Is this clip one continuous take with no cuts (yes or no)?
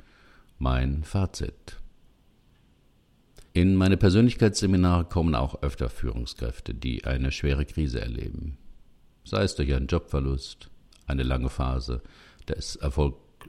no